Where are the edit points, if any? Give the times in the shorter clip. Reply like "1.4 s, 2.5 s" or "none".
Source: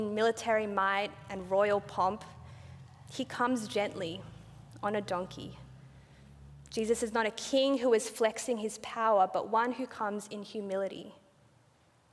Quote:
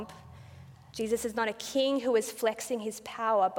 0.9 s

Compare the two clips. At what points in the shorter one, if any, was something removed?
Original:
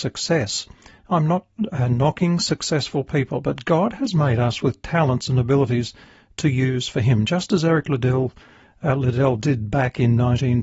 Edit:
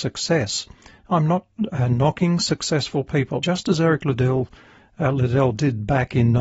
3.4 s

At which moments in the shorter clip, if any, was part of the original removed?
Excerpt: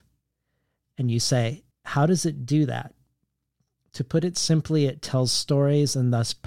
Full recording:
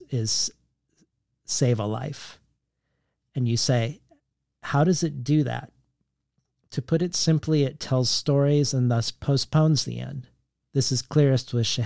1.7 s

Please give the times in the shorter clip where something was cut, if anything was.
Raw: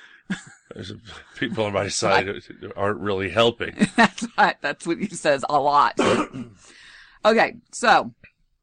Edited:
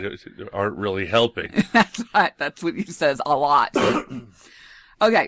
none

